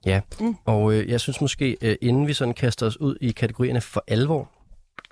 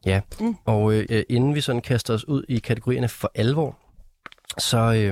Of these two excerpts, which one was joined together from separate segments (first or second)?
second